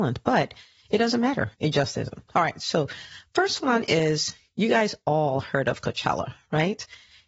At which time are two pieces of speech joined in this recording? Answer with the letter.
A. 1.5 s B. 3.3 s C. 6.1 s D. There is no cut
A